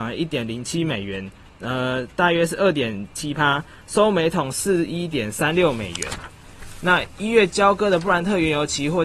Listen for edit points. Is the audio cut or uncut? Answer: uncut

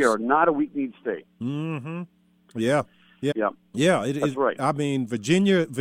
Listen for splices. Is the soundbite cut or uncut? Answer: cut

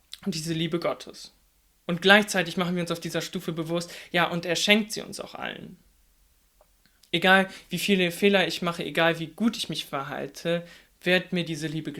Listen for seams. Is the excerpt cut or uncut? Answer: uncut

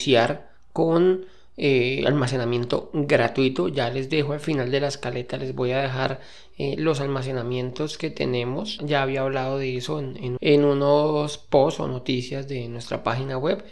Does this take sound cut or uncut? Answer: cut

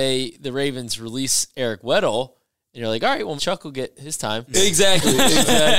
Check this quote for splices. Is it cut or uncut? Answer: cut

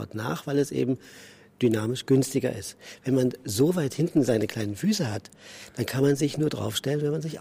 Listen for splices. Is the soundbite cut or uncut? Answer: uncut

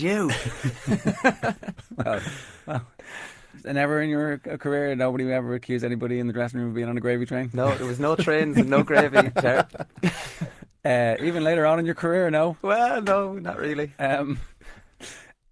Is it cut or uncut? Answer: uncut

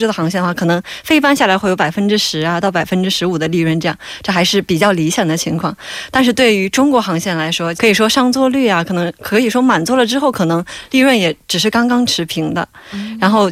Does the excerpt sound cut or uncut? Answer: cut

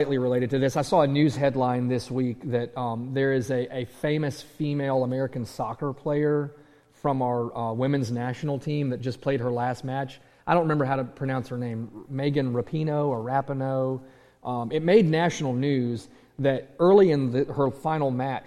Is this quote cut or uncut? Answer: uncut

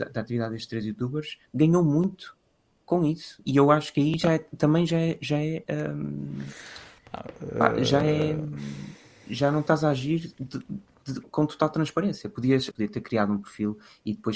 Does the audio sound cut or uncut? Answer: cut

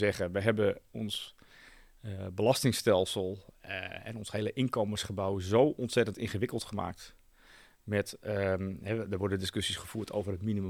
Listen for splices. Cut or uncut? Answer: uncut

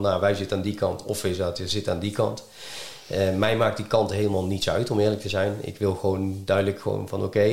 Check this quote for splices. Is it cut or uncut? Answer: uncut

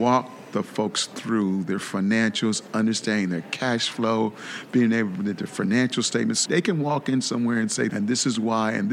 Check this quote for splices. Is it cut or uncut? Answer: cut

